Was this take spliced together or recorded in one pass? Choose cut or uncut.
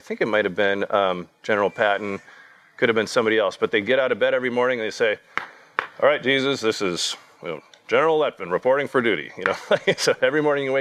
uncut